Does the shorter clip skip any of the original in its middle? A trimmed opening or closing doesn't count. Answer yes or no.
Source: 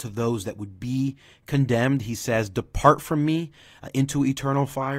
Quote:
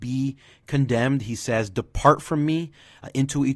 no